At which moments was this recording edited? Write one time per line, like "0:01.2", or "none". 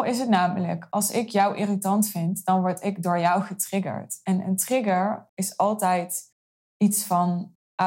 none